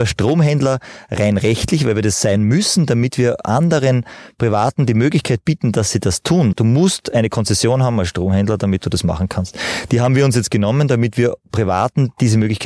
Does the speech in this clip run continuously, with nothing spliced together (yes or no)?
no